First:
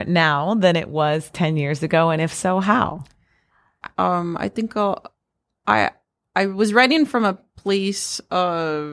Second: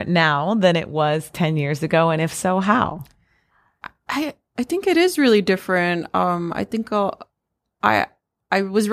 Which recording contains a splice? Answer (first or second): first